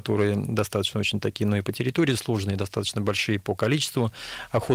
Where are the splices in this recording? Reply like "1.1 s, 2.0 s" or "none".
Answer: none